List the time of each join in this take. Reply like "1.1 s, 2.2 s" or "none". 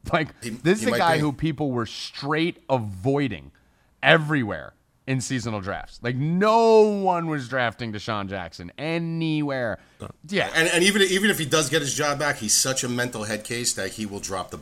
10.0 s